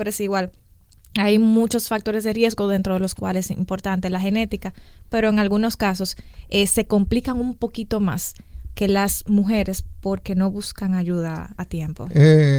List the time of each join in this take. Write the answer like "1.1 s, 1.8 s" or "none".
none